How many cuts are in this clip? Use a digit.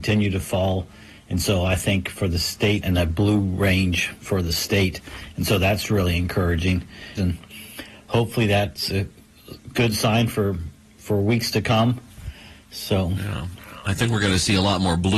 2